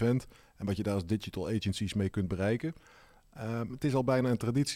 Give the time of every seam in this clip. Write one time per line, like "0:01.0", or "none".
0:03.7

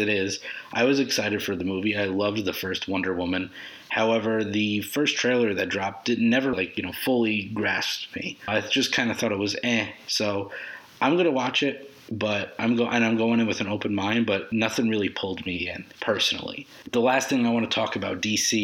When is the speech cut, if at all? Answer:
0:06.5

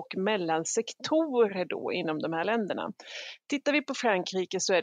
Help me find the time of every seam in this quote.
none

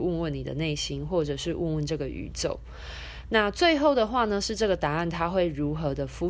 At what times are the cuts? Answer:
none

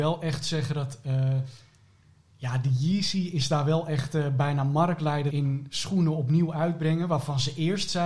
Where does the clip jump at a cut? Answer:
0:05.3

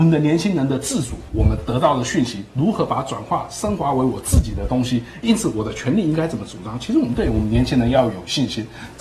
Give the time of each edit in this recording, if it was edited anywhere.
0:01.3

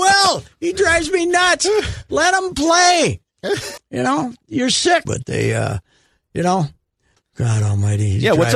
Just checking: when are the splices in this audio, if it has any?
0:03.8
0:05.0
0:07.2

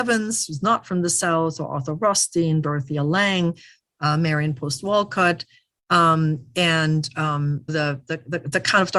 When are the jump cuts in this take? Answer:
0:07.7

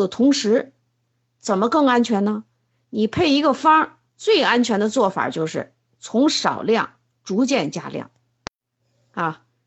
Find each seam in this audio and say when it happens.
0:04.1

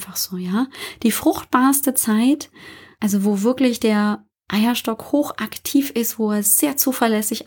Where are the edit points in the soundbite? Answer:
none

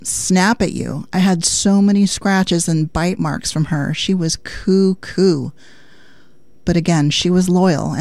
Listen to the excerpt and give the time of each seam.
none

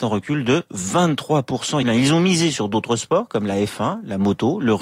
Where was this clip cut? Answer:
0:01.8

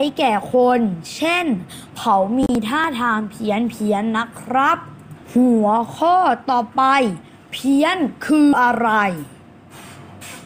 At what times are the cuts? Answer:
0:05.2
0:08.5

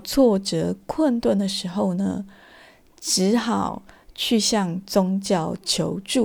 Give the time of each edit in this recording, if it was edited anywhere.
none

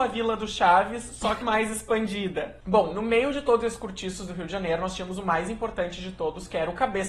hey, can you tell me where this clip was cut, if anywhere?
0:01.4

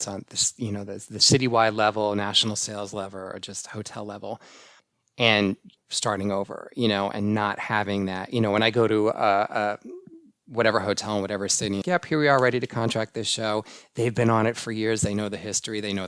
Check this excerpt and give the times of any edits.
0:11.8

